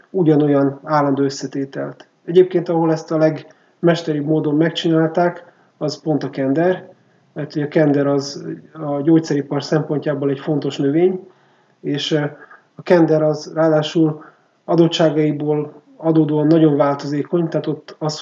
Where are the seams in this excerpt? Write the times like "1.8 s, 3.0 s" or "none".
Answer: none